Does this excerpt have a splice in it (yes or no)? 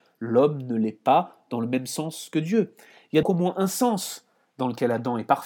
yes